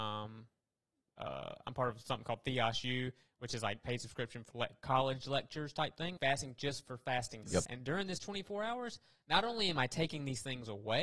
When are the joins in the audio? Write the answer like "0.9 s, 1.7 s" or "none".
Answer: 4.5 s, 6.2 s, 7.7 s